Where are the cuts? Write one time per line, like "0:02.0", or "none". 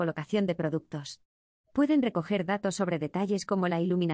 0:01.6

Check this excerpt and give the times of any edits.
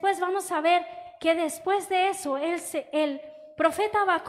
none

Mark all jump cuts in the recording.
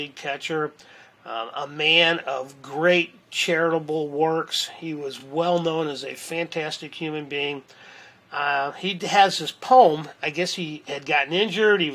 none

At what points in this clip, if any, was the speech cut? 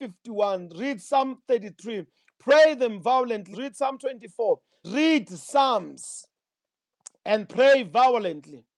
0:03.5
0:04.8

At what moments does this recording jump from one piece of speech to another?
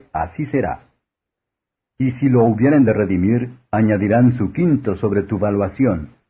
none

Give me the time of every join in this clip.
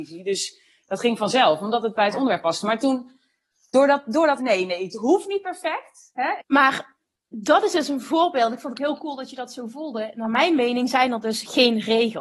0:04.4
0:06.4

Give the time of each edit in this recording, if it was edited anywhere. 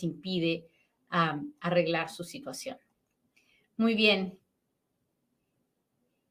none

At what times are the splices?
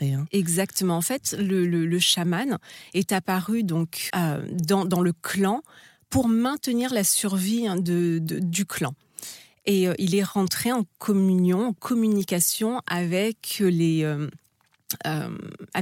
0:04.1

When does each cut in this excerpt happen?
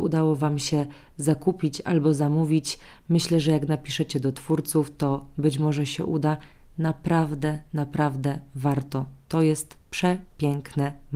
none

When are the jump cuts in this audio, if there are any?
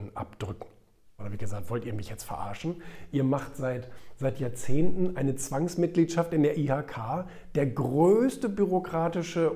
0:01.2

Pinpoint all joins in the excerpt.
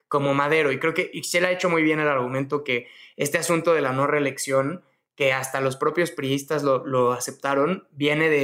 none

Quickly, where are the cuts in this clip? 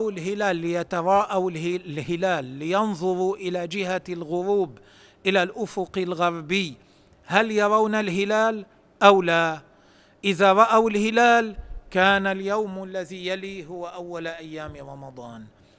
none

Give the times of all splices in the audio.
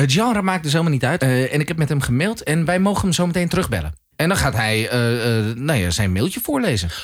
0:01.2

